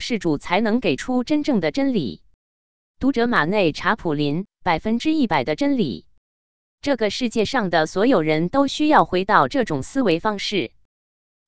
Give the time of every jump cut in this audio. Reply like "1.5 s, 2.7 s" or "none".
none